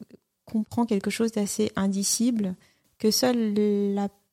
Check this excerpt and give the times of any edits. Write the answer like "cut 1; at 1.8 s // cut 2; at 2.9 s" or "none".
none